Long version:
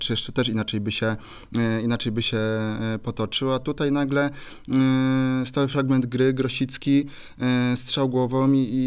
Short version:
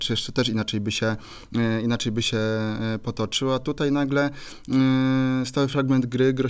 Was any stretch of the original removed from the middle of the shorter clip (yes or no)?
no